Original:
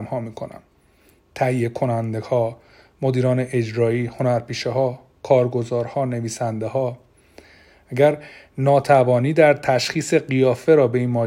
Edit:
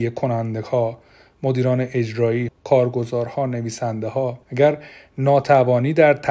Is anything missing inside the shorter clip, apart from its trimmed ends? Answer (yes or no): yes